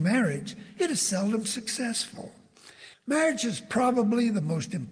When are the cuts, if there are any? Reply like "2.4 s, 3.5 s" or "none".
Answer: 2.9 s